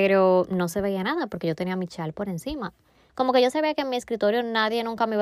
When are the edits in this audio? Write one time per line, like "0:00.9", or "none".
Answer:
0:03.1